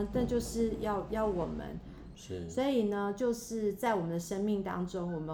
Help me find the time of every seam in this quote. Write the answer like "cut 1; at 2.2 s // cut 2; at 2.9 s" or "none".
cut 1; at 2.1 s